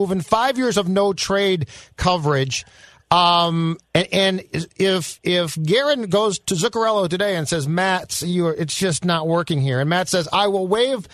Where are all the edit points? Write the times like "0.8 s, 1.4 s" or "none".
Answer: none